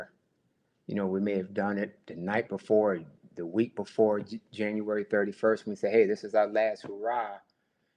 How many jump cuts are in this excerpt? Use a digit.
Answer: 0